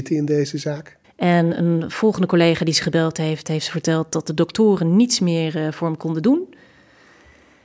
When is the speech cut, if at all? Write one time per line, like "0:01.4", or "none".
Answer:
0:01.0